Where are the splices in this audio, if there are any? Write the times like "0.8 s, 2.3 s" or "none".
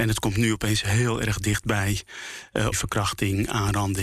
2.7 s